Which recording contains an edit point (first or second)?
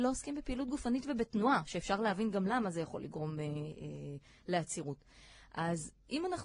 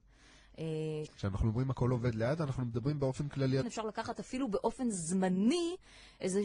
second